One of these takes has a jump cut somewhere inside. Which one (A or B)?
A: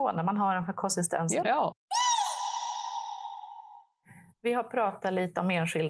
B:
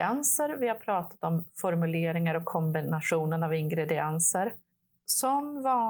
A